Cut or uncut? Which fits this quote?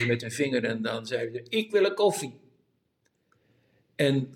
uncut